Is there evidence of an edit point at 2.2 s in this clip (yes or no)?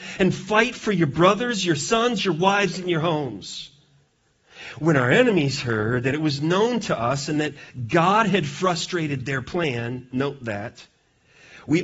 yes